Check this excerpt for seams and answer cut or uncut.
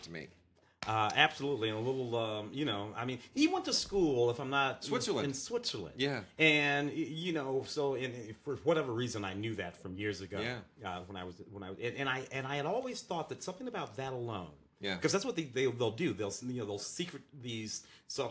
uncut